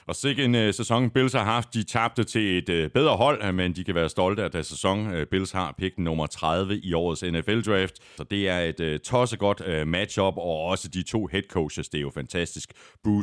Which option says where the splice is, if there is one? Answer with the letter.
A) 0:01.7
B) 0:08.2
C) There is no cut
B